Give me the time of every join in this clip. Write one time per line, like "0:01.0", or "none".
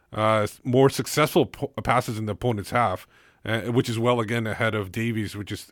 none